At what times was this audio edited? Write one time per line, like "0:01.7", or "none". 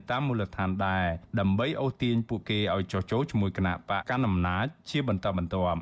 0:04.0